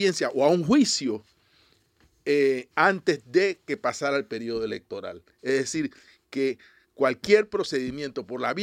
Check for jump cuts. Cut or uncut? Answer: cut